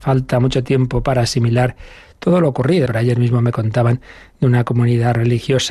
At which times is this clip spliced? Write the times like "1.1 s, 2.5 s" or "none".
2.9 s